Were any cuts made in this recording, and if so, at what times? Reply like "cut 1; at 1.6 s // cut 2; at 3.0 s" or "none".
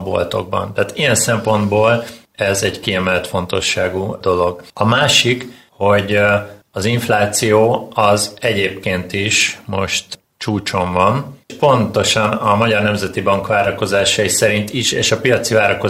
cut 1; at 4.7 s // cut 2; at 11.5 s